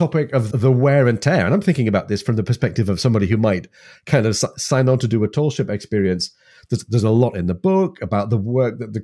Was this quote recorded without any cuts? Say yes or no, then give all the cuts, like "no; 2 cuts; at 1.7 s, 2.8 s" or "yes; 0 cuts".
yes; 0 cuts